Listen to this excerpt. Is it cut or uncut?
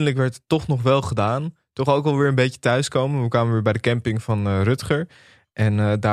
uncut